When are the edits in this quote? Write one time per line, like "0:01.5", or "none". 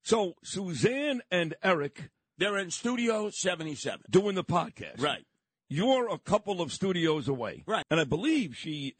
0:07.8

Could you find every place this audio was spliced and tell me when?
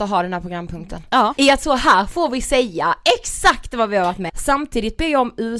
0:01.4
0:04.3

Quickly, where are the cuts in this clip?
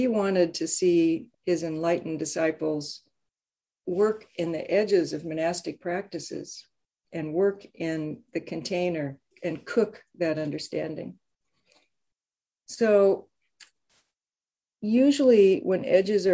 0:01.3
0:09.3

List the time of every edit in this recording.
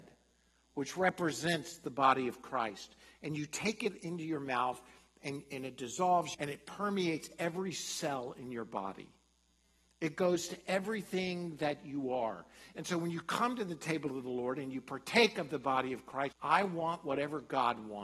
0:06.3
0:16.3

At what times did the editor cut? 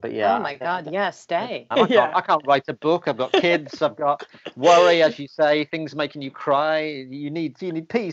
0:01.7

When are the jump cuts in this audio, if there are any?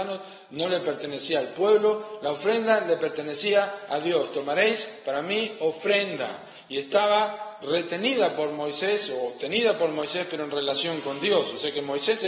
none

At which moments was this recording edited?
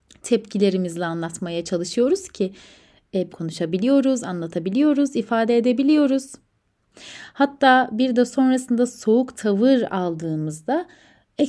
0:03.3

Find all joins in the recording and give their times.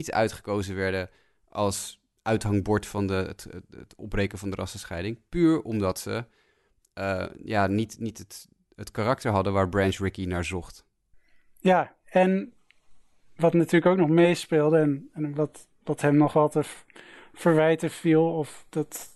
none

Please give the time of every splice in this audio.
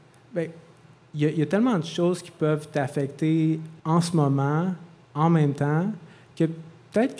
0:03.8

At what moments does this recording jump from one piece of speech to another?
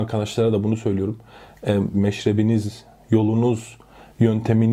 0:01.9

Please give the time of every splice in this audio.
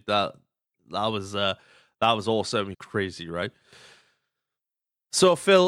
0:02.7

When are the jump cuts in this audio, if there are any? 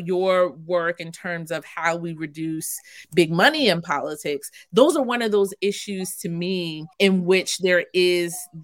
0:06.9

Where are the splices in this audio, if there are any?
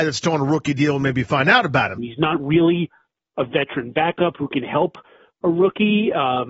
0:02.0

